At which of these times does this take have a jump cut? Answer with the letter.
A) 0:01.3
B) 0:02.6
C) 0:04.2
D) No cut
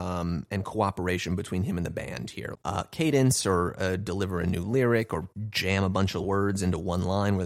B